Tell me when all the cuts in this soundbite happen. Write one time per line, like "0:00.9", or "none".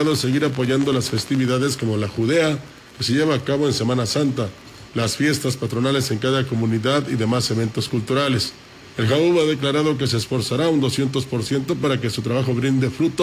0:04.9
0:08.9